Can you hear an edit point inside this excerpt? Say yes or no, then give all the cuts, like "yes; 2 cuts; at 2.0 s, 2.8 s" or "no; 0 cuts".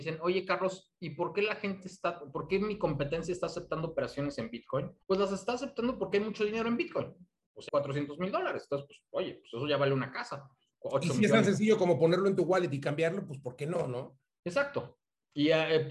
yes; 2 cuts; at 5.0 s, 7.7 s